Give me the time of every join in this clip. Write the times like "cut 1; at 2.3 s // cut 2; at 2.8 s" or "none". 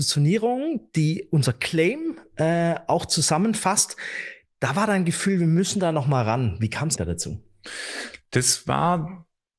cut 1; at 7.0 s